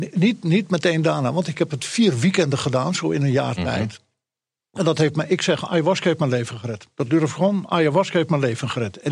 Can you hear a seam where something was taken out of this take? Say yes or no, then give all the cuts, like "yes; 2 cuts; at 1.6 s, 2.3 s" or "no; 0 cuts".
no; 0 cuts